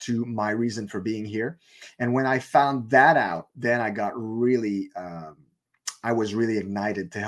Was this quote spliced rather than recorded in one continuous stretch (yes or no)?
no